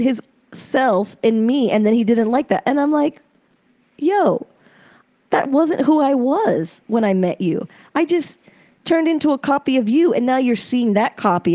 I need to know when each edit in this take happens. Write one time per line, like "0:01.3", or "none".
none